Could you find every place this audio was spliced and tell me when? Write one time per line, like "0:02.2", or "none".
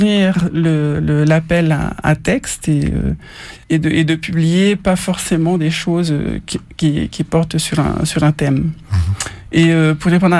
0:03.6

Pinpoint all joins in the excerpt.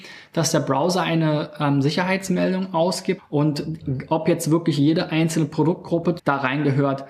0:03.2
0:06.2

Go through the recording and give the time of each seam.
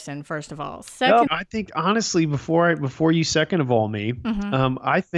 0:01.3

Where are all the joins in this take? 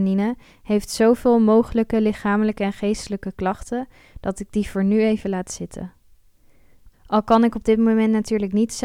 0:06.9

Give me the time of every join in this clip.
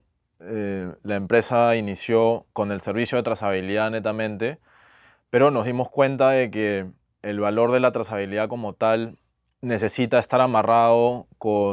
0:02.5

